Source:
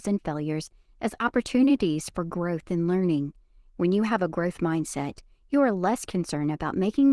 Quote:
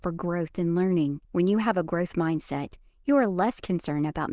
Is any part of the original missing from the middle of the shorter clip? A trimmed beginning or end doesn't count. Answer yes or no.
yes